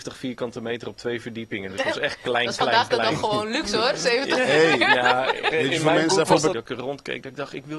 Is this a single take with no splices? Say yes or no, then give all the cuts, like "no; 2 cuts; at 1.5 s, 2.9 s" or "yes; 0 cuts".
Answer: no; 2 cuts; at 5.5 s, 6.5 s